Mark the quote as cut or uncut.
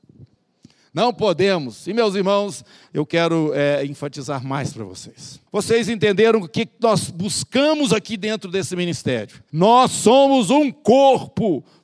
cut